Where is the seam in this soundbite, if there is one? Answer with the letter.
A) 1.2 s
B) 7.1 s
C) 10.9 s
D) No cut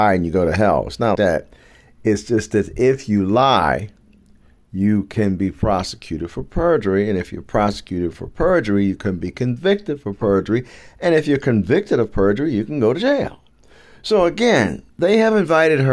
A